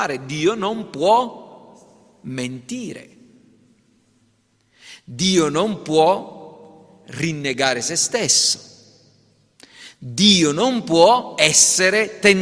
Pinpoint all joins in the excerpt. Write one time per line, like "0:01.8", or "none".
none